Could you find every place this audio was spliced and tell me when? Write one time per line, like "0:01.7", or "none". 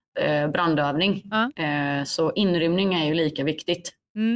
0:01.6